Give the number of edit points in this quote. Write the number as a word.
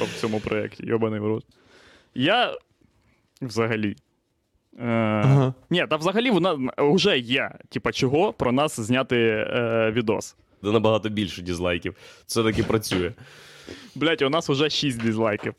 one